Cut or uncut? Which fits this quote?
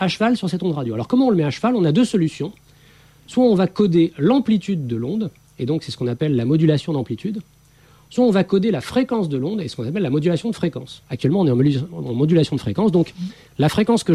uncut